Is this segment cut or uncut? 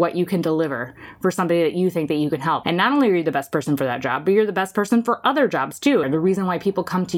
cut